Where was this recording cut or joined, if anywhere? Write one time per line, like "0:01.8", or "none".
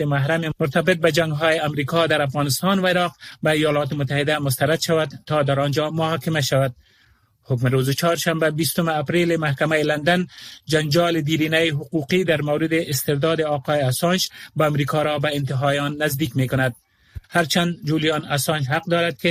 0:17.2